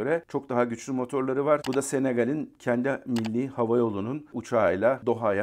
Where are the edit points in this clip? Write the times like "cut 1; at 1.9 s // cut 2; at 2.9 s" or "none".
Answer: cut 1; at 1.6 s

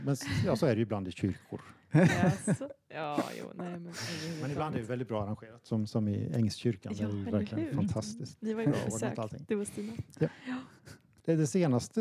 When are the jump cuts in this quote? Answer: none

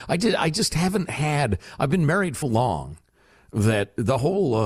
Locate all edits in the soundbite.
cut 1; at 2.4 s

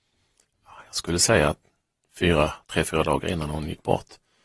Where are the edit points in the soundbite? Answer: none

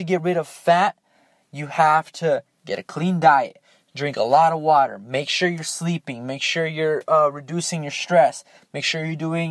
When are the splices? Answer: none

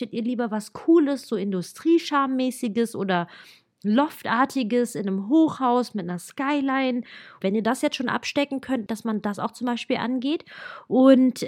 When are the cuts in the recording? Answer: cut 1; at 7.4 s // cut 2; at 8.9 s

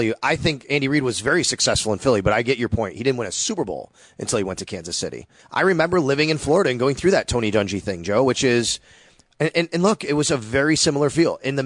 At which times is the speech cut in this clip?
cut 1; at 5.4 s

